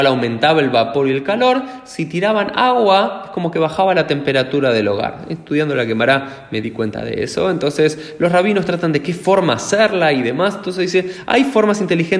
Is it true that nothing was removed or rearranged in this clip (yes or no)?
yes